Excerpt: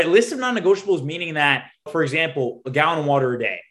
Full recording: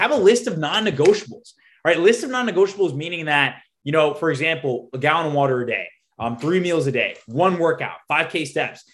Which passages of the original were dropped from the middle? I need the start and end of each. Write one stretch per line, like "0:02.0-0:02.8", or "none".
0:03.8-0:04.1